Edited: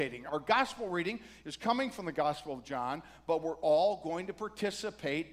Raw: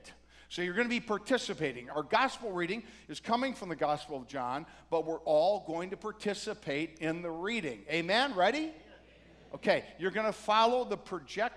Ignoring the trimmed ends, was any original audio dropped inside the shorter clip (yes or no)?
no